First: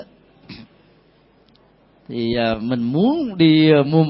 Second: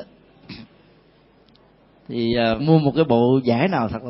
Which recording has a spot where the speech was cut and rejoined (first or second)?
second